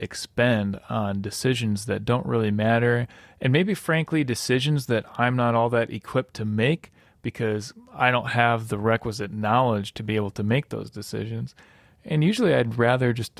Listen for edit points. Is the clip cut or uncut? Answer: uncut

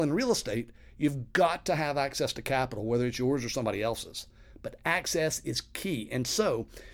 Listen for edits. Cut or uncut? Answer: uncut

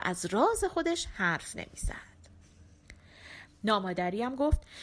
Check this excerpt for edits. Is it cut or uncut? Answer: cut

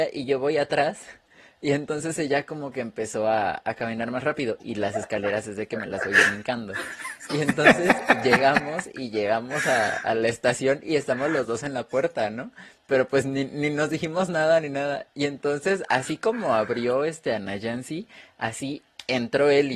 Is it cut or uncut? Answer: cut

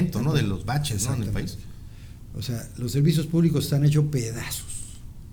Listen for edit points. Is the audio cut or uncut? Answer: uncut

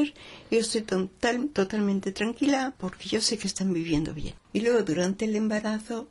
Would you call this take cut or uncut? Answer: cut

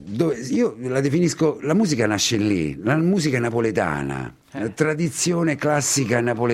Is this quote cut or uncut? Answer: cut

